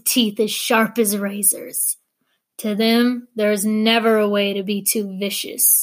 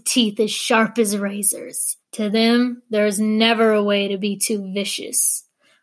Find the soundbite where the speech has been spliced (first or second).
second